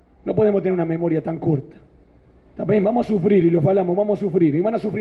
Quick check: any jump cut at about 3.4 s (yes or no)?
no